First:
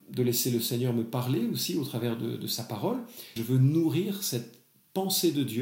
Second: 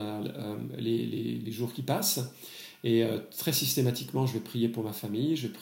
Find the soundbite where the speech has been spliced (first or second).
first